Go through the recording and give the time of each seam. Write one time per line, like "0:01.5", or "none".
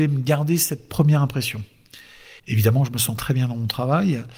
0:02.4